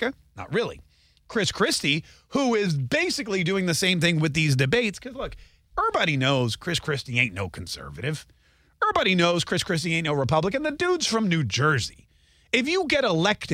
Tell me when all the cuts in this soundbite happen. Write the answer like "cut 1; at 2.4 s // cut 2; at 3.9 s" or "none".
none